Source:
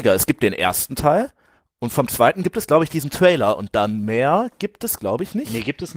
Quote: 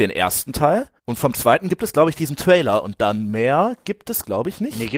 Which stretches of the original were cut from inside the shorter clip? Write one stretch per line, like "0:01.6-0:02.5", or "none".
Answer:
0:01.4-0:01.7